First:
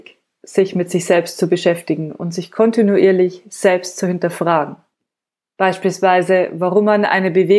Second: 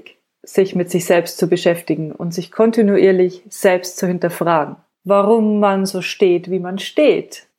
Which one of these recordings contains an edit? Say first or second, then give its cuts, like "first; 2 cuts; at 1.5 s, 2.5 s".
second; 1 cut; at 5.0 s